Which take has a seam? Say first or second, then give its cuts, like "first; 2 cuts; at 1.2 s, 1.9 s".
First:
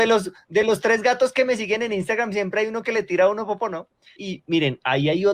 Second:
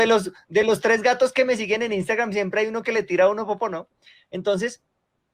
first; 1 cut; at 4.2 s